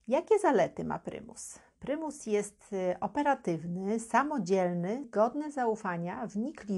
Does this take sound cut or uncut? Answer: cut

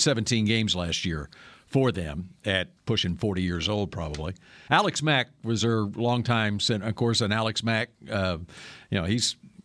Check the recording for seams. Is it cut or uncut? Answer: cut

